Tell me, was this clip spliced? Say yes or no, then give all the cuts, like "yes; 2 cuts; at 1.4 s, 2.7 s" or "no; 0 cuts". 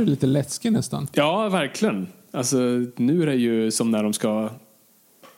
no; 0 cuts